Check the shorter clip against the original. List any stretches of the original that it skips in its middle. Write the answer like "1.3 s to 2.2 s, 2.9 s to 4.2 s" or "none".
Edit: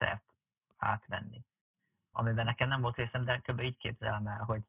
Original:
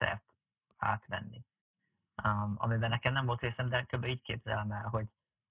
2.1 s to 2.6 s